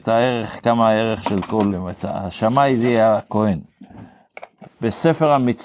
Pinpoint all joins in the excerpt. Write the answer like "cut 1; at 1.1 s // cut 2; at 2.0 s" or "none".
cut 1; at 1.7 s // cut 2; at 4.6 s